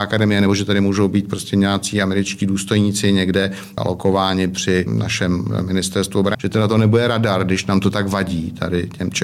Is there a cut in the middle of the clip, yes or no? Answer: yes